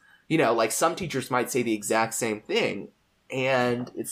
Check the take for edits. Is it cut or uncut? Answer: uncut